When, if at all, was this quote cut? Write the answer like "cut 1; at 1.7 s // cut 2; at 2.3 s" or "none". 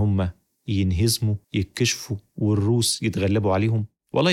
cut 1; at 1.4 s